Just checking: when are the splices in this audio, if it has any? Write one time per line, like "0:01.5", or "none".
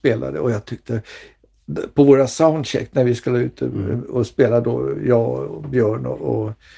none